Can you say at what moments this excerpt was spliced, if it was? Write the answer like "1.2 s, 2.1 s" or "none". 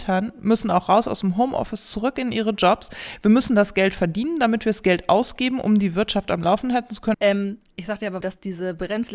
7.1 s, 8.2 s